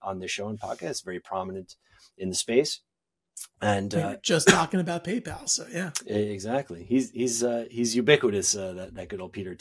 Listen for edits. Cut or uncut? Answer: uncut